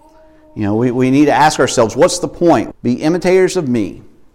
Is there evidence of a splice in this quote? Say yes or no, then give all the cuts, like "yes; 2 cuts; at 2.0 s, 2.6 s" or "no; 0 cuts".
yes; 1 cut; at 2.7 s